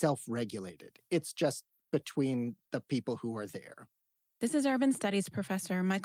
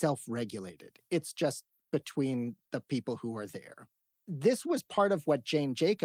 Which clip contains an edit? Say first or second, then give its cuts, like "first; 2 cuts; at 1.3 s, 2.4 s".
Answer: second; 1 cut; at 4.1 s